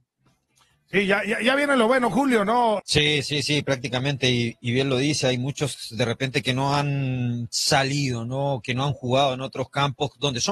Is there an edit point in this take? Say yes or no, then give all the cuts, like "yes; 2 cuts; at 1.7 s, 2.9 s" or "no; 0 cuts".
yes; 1 cut; at 2.8 s